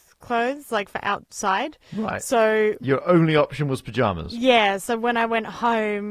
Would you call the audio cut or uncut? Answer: uncut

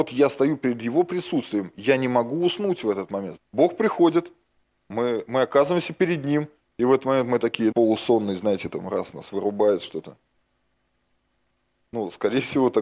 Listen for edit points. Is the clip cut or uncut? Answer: cut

